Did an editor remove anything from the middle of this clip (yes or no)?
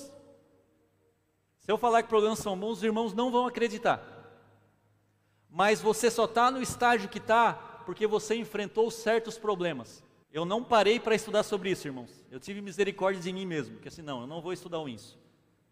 yes